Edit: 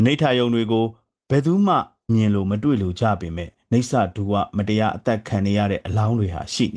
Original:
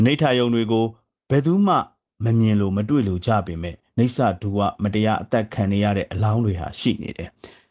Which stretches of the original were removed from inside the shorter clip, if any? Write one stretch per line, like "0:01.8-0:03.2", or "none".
0:02.1-0:02.3